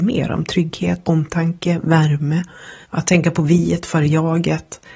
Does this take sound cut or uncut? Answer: cut